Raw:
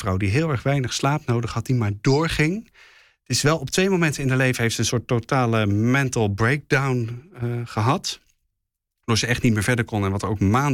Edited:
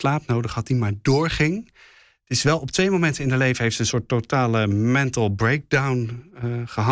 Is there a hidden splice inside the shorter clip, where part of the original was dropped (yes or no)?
no